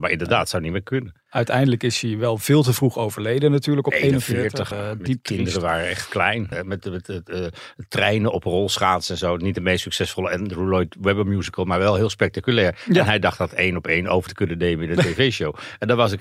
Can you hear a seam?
yes; 2 cuts; at 4.7 s, 6.5 s

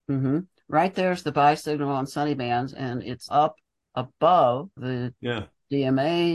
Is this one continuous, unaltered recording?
no; 2 cuts; at 3.3 s, 4.8 s

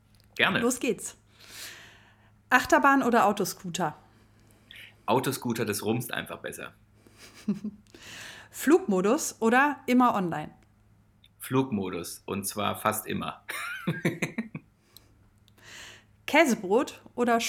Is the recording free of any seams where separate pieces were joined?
yes; 0 cuts

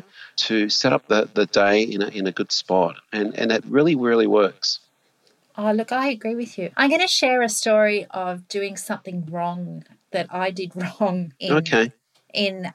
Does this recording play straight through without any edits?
yes; 0 cuts

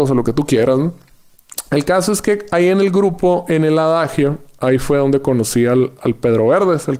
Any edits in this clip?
yes; 1 cut; at 6.0 s

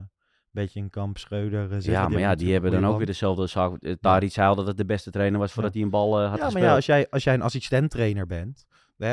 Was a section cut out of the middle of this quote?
no; 0 cuts

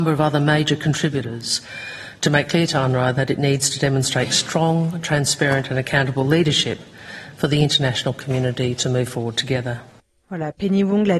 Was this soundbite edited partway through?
no; 0 cuts

